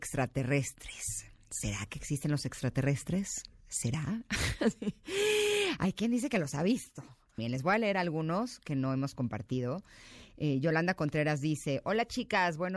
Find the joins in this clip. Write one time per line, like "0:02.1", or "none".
0:07.4